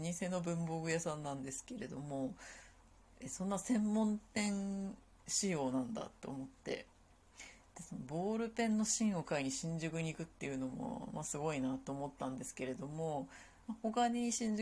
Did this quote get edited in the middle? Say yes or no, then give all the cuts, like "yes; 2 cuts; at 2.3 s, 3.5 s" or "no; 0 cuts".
no; 0 cuts